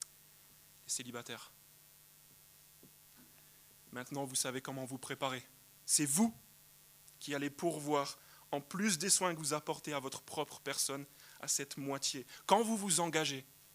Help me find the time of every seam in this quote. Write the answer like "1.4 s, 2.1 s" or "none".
5.8 s